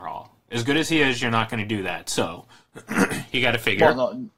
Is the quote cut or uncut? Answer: uncut